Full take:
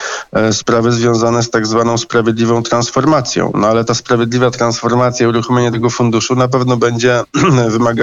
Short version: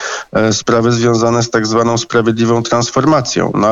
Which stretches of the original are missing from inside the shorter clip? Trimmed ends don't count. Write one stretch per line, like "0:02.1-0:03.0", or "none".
none